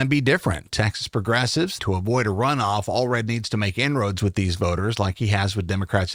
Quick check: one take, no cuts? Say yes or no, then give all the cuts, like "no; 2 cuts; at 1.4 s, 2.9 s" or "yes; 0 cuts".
no; 1 cut; at 1.8 s